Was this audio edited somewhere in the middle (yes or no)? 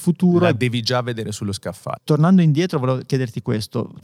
yes